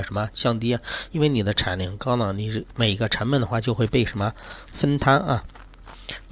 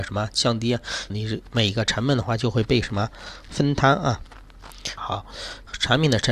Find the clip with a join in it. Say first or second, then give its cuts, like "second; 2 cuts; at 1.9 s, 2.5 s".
second; 2 cuts; at 1.1 s, 5.0 s